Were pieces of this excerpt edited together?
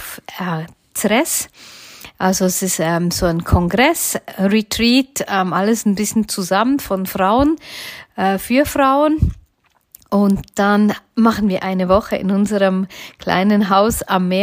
no; 0 cuts

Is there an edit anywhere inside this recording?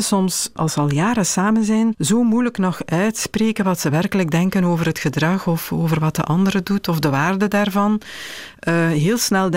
no; 0 cuts

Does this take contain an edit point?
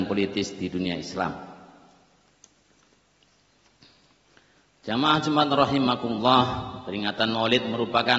no; 0 cuts

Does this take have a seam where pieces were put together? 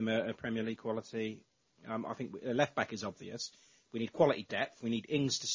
no; 0 cuts

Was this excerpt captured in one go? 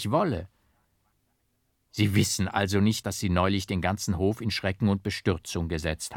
no; 1 cut; at 3.0 s

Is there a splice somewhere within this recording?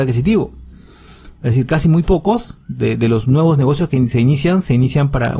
no; 0 cuts

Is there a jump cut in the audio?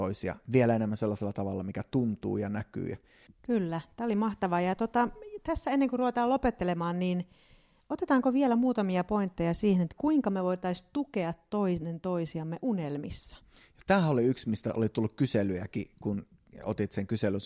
yes; 1 cut; at 3.3 s

